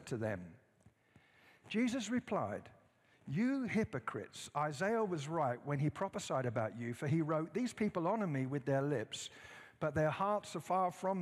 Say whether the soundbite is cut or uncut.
uncut